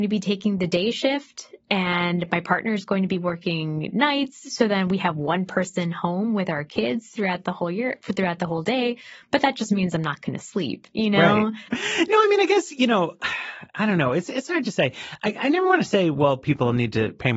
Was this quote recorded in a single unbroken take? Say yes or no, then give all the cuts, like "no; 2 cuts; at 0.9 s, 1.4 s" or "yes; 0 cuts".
no; 1 cut; at 11.7 s